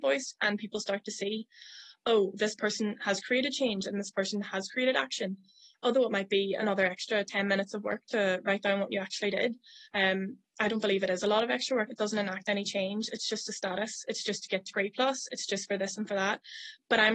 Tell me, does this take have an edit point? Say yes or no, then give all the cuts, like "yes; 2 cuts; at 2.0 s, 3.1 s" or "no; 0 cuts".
yes; 1 cut; at 11.9 s